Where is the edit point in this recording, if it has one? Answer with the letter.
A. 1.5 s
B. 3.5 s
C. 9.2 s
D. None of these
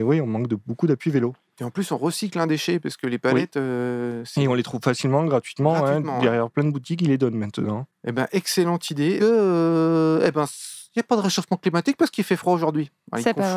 C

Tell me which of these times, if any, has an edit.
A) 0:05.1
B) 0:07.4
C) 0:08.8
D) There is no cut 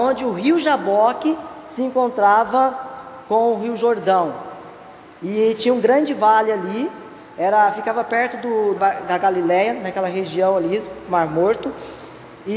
C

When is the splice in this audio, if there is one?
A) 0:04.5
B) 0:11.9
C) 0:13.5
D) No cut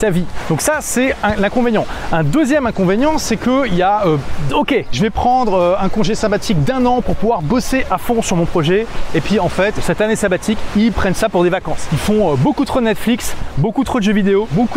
A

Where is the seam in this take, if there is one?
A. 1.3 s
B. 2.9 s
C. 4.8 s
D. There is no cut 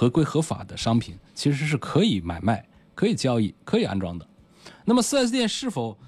D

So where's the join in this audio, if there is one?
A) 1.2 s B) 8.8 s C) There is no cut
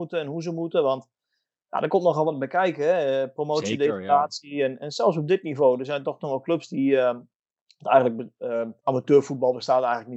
B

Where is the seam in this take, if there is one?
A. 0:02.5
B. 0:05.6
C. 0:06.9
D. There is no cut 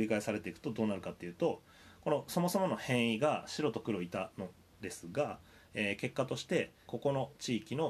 C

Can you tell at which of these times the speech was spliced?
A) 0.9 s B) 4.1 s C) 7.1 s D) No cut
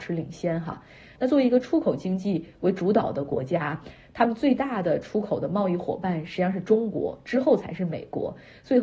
D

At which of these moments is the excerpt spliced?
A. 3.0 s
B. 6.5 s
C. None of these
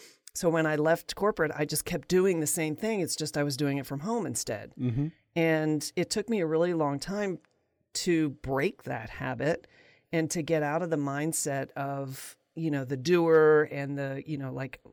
C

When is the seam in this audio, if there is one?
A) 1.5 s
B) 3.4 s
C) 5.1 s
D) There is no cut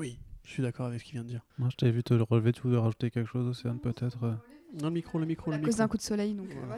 A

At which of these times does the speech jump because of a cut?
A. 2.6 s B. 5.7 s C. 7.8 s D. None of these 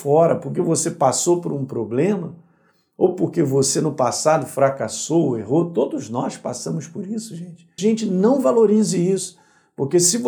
C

